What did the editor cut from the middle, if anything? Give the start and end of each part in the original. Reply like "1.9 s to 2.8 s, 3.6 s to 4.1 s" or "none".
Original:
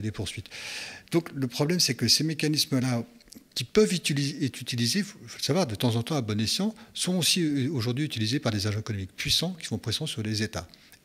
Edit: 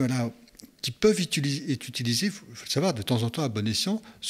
none